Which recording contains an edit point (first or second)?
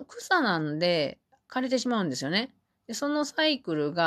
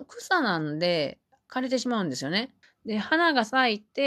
second